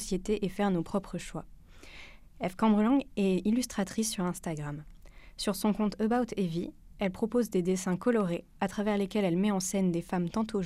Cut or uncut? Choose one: uncut